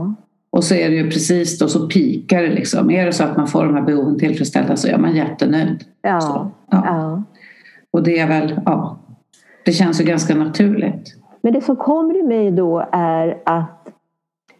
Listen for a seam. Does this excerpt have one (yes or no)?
no